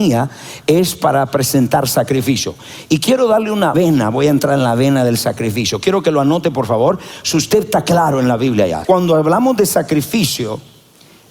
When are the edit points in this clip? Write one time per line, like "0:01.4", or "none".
0:08.8